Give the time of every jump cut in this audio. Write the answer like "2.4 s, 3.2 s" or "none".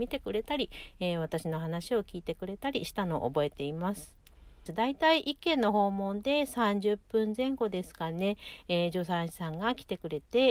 4.7 s